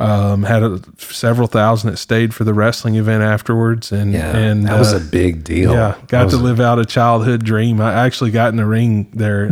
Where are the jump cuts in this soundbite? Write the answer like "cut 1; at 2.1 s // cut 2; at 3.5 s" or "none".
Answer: none